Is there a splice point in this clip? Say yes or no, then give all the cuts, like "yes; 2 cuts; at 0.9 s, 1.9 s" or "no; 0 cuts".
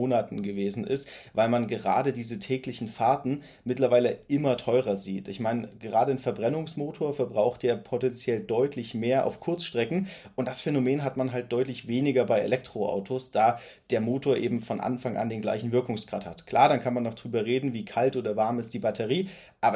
no; 0 cuts